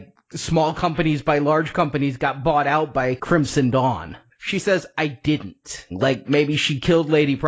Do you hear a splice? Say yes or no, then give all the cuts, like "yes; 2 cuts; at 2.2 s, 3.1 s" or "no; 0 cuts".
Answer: yes; 2 cuts; at 4.3 s, 5.9 s